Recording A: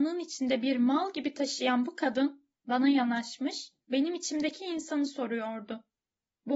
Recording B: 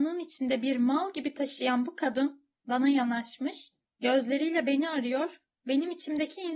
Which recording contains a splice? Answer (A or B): A